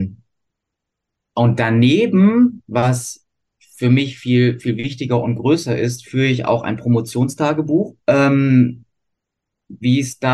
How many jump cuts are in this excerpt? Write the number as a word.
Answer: one